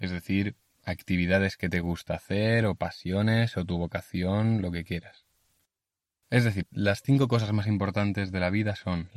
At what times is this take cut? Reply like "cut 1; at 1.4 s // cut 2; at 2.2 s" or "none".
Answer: cut 1; at 6.6 s